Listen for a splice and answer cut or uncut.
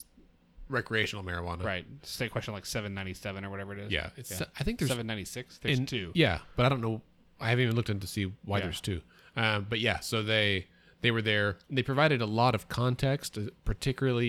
cut